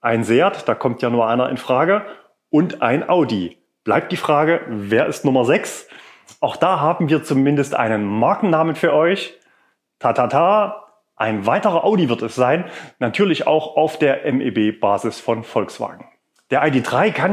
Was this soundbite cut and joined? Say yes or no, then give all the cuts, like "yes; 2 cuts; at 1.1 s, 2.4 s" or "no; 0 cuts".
no; 0 cuts